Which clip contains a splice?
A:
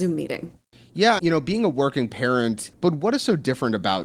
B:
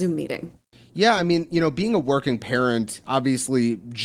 A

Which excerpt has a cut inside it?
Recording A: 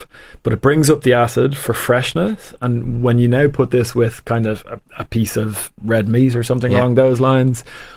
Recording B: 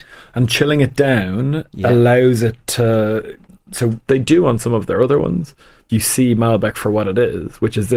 B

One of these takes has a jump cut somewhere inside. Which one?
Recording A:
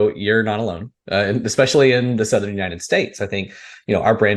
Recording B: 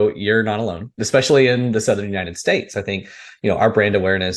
B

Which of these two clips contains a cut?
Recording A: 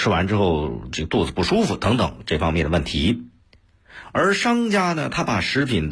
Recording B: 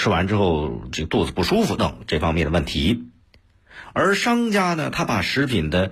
B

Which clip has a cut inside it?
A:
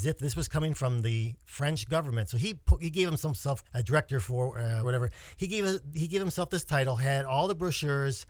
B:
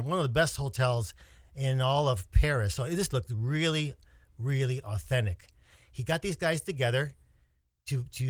A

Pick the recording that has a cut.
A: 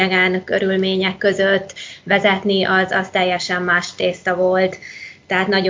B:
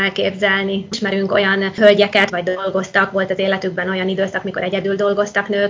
B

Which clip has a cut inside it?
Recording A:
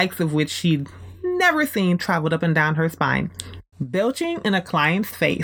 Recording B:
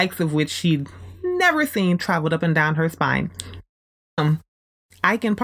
A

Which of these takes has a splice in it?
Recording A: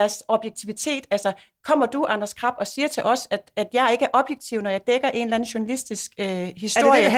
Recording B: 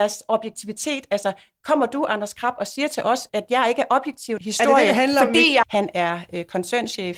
B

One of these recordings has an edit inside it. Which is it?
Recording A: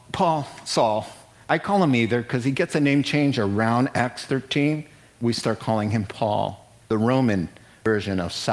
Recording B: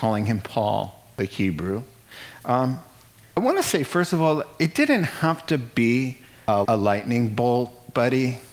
B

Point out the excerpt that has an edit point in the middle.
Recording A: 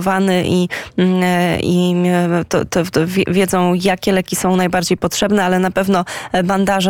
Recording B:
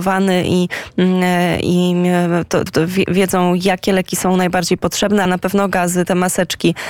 B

